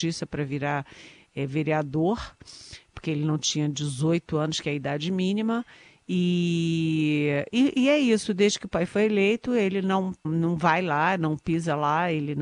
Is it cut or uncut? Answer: cut